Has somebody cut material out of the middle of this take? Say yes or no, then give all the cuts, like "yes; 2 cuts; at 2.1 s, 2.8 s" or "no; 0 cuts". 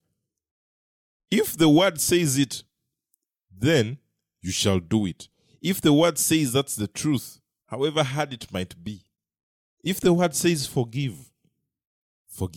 yes; 1 cut; at 7.6 s